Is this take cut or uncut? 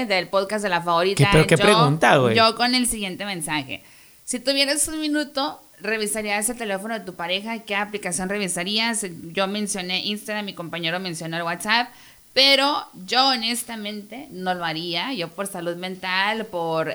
uncut